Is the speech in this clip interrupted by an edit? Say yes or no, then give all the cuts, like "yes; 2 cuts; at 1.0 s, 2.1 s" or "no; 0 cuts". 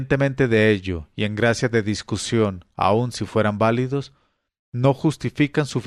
no; 0 cuts